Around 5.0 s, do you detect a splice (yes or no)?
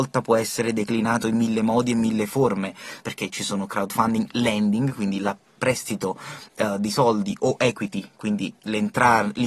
no